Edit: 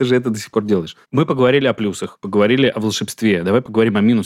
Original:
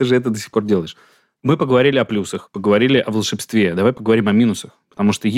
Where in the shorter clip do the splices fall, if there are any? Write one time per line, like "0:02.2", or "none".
0:01.0